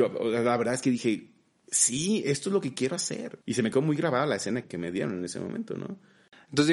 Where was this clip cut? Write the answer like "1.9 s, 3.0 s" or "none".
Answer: 3.4 s, 4.6 s